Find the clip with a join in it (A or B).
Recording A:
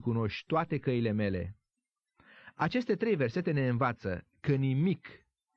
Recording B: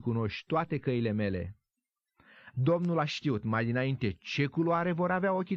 B